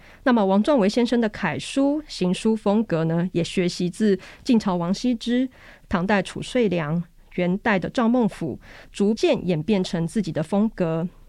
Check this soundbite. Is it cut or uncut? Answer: uncut